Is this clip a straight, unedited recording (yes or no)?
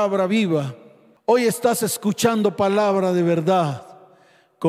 yes